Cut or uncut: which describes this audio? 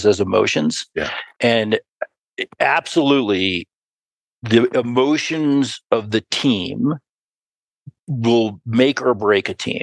uncut